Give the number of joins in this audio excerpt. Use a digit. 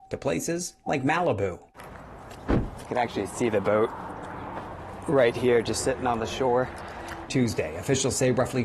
1